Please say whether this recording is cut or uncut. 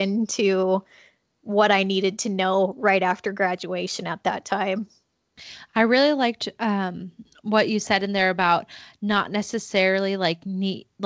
uncut